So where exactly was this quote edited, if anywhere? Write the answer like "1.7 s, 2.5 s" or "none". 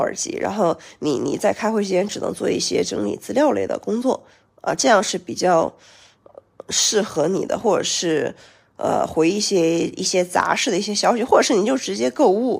none